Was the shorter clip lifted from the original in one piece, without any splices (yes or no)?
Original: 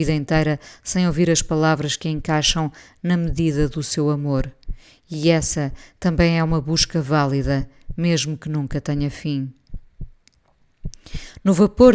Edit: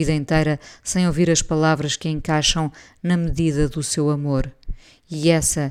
yes